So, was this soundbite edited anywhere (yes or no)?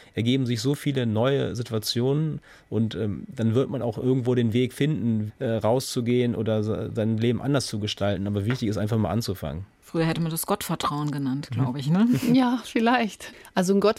yes